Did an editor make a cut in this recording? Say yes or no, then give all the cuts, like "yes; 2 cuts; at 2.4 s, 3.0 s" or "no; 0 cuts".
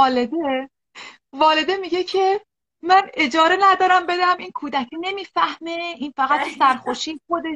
no; 0 cuts